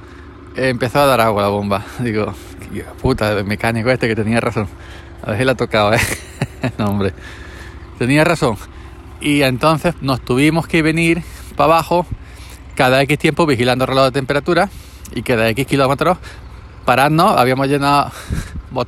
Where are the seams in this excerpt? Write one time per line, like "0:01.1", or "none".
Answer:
0:09.9